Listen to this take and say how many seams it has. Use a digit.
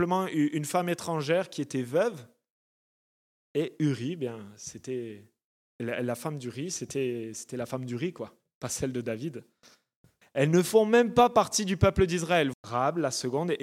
2